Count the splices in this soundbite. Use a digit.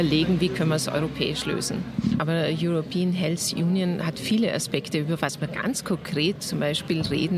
1